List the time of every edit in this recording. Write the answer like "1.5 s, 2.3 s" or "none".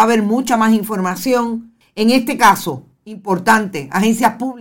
1.8 s